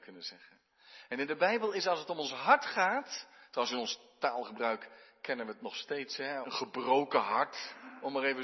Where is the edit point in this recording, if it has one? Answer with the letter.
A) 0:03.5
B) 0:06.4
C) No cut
B